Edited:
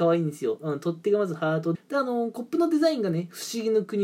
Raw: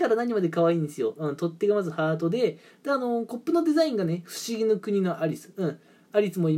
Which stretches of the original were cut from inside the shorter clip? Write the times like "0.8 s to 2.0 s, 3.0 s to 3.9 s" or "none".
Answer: 2.3 s to 2.7 s